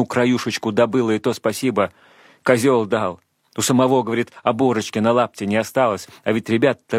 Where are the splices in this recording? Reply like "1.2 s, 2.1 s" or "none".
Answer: none